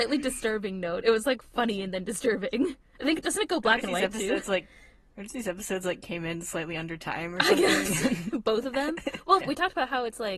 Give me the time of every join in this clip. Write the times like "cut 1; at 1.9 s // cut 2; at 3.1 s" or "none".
cut 1; at 5.1 s // cut 2; at 9.4 s